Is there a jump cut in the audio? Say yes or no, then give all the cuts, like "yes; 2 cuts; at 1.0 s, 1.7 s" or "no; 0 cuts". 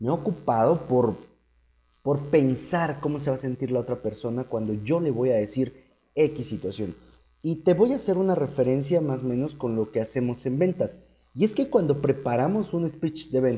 no; 0 cuts